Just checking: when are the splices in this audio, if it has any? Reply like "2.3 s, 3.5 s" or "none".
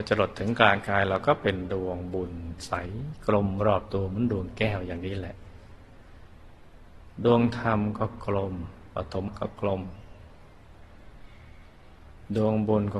9.3 s